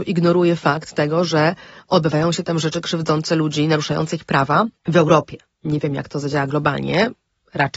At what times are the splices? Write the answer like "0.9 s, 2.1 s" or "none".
4.8 s